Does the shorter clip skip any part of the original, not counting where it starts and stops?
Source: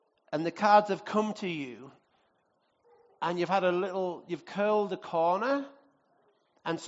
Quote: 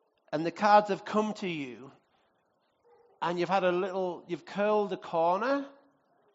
no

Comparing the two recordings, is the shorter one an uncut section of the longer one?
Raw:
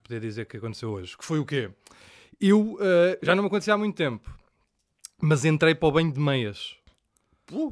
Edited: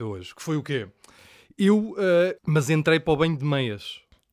no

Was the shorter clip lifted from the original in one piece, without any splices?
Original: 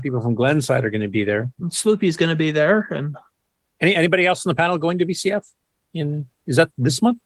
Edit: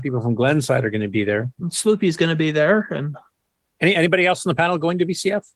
yes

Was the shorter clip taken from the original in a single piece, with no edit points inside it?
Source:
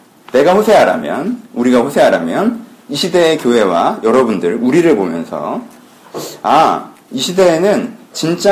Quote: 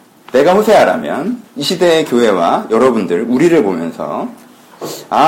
no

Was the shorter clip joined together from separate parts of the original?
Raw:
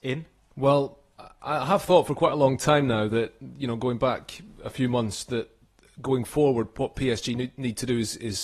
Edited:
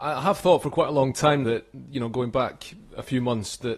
yes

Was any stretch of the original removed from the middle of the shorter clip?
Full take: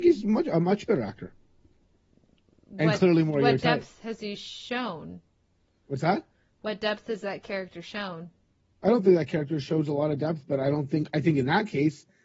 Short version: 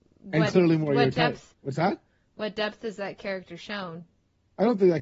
yes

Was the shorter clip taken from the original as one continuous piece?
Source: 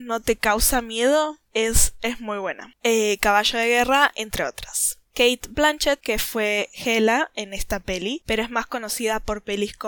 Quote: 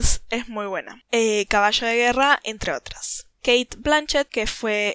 yes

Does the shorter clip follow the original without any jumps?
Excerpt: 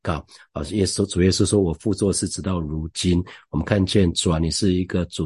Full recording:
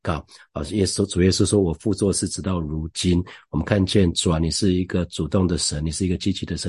yes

